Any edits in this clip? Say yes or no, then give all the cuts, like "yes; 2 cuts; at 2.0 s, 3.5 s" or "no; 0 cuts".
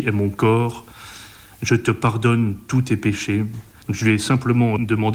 yes; 1 cut; at 3.8 s